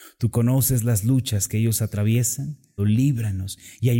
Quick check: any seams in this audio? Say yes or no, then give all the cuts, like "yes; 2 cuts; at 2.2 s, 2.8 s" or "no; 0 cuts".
yes; 1 cut; at 2.8 s